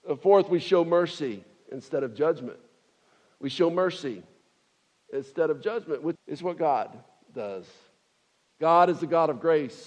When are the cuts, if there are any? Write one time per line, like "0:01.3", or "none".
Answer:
0:06.2